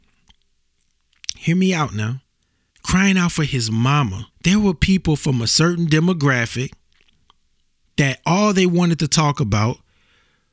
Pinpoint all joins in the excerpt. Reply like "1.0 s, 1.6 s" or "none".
2.7 s, 4.3 s

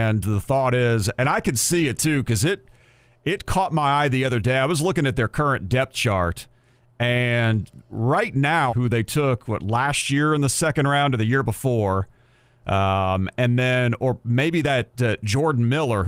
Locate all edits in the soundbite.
8.7 s

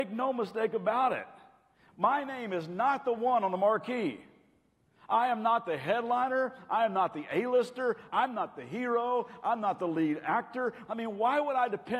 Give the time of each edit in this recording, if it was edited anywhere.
8.1 s, 10.9 s

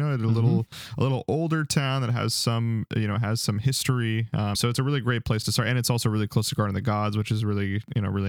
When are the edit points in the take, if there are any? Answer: 4.5 s

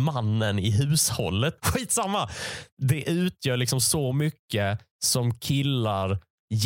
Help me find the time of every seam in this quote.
1.6 s

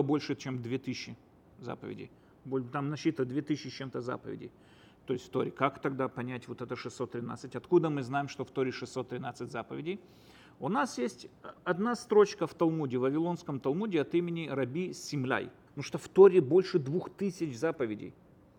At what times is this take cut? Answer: 15.7 s

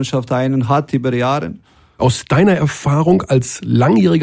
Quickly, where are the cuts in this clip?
2.0 s

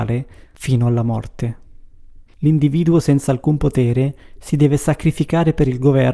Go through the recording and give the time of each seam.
2.3 s

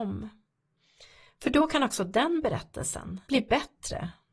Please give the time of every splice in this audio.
3.3 s

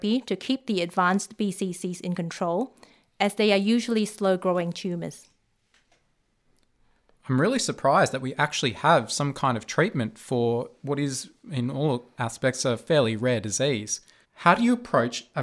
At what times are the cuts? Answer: 14.2 s

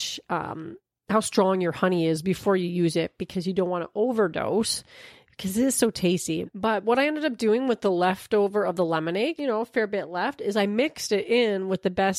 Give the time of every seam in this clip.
6.5 s, 9.4 s

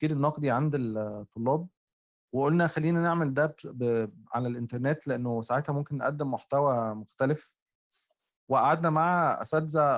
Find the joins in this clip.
none

